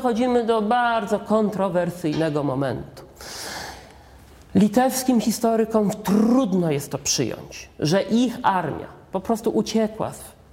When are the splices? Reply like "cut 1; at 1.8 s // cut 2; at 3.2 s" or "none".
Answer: none